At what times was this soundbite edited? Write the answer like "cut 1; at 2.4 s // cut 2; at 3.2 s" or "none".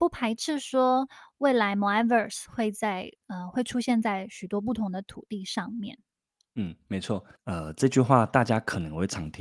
cut 1; at 7.3 s